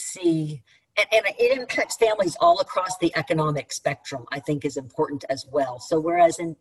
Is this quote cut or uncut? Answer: uncut